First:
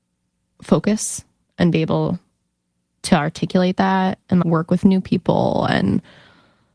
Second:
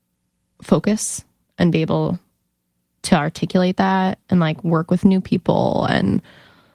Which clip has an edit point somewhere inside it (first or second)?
first